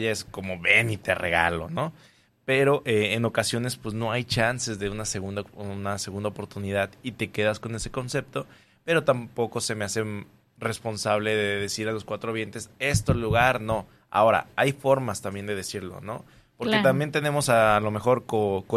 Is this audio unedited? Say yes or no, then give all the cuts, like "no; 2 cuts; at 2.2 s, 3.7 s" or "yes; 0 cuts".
yes; 0 cuts